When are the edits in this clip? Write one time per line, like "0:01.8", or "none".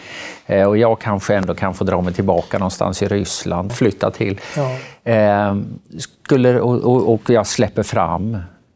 0:03.7